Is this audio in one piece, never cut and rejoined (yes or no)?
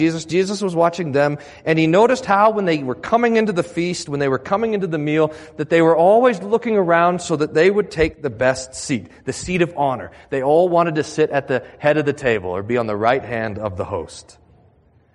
yes